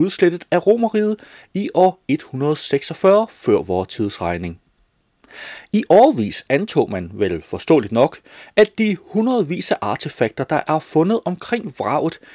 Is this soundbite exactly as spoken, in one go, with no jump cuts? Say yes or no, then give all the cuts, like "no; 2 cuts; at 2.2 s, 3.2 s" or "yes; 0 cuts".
yes; 0 cuts